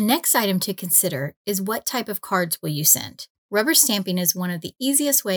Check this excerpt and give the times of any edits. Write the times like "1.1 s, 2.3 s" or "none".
3.4 s

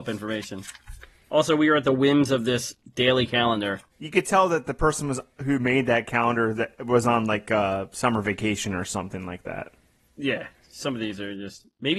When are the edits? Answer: 3.9 s

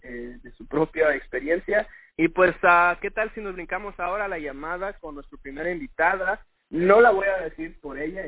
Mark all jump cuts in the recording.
2.1 s, 6.6 s

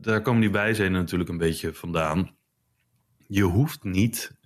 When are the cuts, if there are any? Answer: none

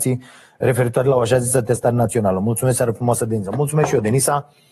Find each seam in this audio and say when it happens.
none

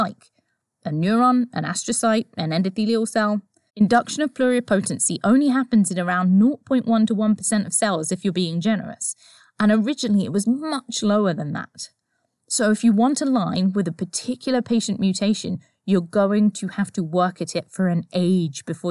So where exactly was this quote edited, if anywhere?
3.7 s

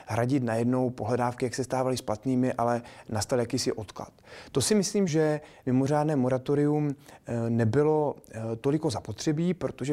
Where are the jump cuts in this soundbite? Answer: 5.1 s

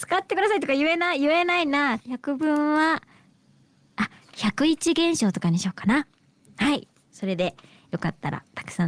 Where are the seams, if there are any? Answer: 2.0 s

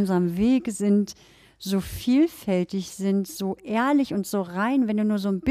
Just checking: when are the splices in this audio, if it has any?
none

